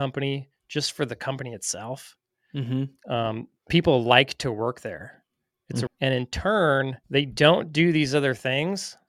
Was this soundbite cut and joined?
yes; 2 cuts; at 5.9 s, 7.0 s

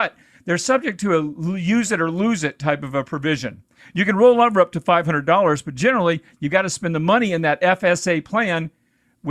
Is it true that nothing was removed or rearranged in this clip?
yes; 0 cuts

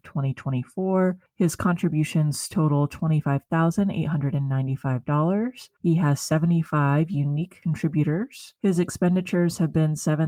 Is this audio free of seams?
yes; 0 cuts

